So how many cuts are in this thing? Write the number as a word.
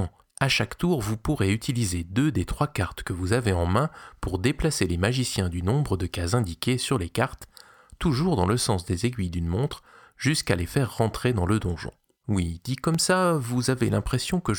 zero